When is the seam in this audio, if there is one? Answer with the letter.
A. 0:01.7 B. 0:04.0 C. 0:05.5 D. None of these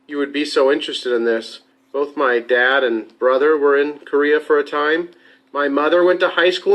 A